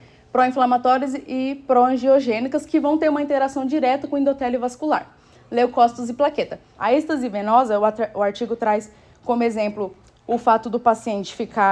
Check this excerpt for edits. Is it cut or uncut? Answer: cut